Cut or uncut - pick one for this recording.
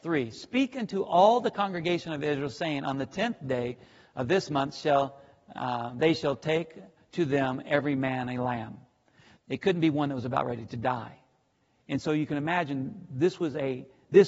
cut